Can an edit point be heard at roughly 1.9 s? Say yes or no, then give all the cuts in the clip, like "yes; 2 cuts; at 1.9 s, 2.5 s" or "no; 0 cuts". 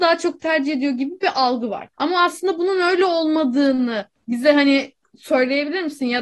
yes; 1 cut; at 1.9 s